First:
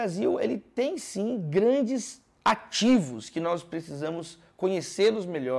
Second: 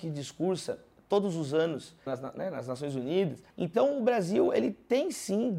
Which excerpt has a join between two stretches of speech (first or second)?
second